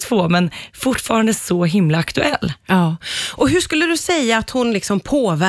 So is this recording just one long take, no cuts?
yes; 0 cuts

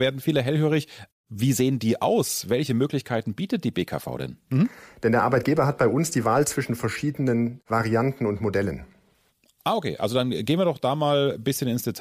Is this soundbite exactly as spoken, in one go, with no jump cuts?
no; 1 cut; at 4.5 s

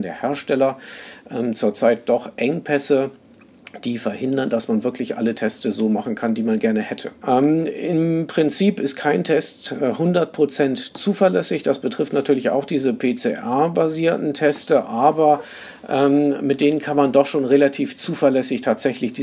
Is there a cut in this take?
no; 0 cuts

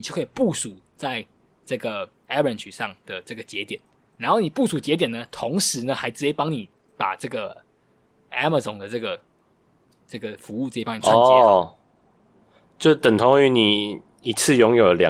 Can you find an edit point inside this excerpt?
no; 0 cuts

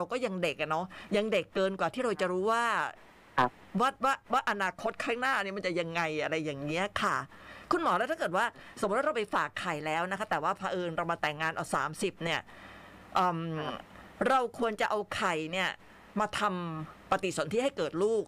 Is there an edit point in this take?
no; 0 cuts

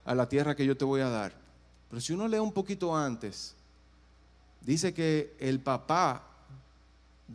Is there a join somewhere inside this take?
no; 0 cuts

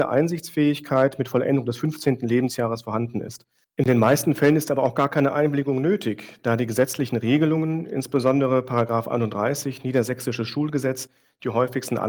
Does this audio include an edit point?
yes; 1 cut; at 3.6 s

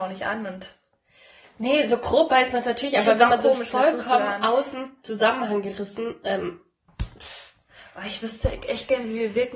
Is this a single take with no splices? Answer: yes; 0 cuts

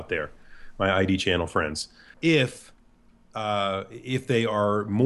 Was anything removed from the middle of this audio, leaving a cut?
yes; 1 cut; at 2.1 s

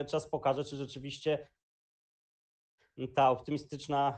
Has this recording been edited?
no; 0 cuts

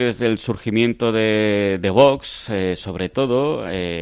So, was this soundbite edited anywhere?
no; 0 cuts

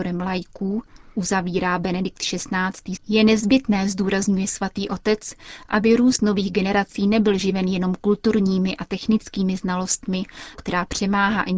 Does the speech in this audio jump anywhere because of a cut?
yes; 2 cuts; at 3.0 s, 10.5 s

